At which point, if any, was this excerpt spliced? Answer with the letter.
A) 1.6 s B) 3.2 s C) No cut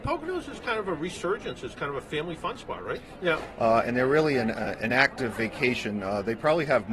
B